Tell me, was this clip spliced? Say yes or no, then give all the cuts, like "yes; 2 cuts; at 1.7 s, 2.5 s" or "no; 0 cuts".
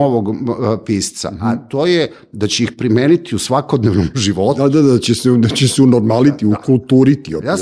no; 0 cuts